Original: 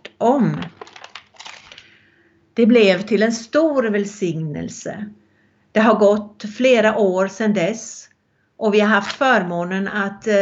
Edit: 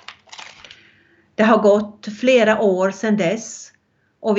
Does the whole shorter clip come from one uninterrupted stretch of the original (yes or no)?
no